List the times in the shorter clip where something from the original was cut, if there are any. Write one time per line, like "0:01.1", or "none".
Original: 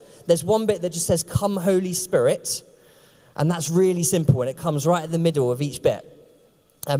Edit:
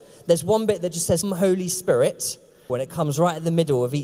0:01.2
0:02.7